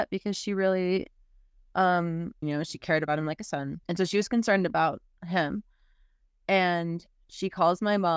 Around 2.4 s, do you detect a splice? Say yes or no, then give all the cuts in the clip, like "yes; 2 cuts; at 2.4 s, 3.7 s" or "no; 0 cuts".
yes; 2 cuts; at 2.4 s, 3.8 s